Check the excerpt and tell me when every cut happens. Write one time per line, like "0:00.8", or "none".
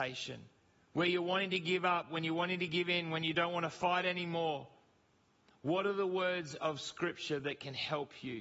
none